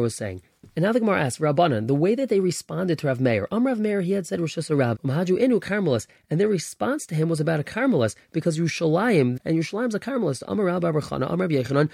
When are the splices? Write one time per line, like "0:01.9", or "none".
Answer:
0:04.9
0:09.4